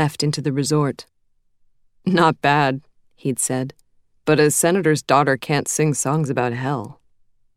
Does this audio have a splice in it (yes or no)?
no